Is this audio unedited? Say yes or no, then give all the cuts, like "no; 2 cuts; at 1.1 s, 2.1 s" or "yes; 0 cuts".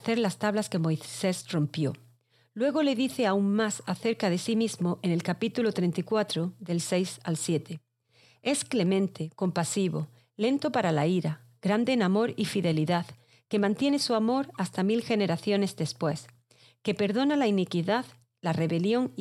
yes; 0 cuts